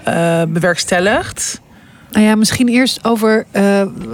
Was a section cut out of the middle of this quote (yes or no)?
no